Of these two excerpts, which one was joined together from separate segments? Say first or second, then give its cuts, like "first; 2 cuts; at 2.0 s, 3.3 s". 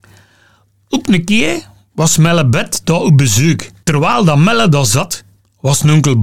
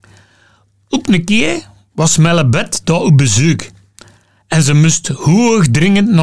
first; 1 cut; at 3.8 s